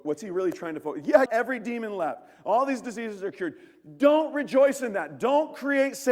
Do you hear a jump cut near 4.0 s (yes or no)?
no